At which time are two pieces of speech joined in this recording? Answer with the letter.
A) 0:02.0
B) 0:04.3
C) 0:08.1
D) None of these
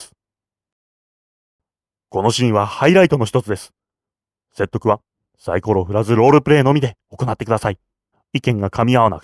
C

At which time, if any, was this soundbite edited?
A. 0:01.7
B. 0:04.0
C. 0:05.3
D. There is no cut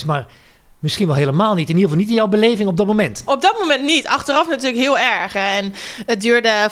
C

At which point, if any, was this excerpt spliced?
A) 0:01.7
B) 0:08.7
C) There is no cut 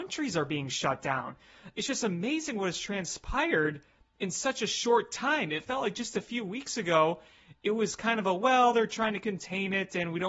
C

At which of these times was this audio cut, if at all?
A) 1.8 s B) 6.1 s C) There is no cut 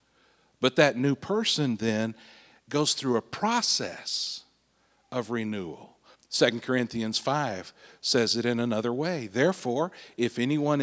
B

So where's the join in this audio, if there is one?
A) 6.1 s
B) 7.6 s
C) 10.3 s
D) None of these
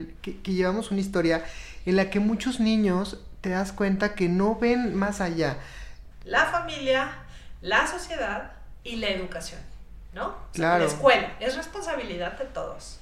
A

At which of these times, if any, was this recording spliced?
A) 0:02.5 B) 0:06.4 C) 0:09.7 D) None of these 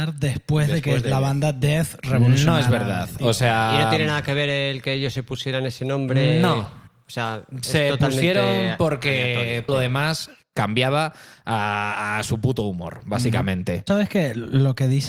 C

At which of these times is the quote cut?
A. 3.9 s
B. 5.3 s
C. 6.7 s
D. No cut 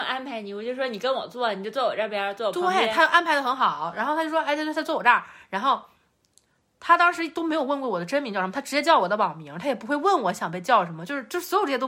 D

